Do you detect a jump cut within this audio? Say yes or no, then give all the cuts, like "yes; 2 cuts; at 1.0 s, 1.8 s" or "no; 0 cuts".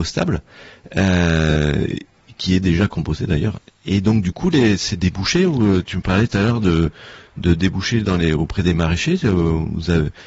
no; 0 cuts